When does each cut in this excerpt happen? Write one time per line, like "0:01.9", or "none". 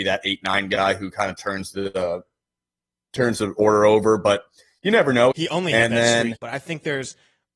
0:05.3
0:06.4